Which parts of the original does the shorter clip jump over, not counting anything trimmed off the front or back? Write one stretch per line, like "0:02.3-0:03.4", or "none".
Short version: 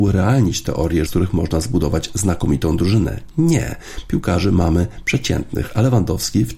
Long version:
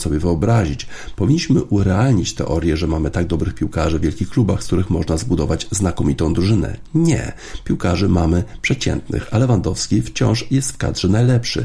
0:02.8-0:04.6